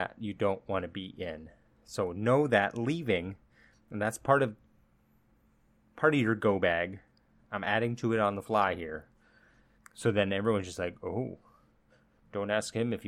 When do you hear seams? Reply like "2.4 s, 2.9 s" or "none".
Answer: 9.8 s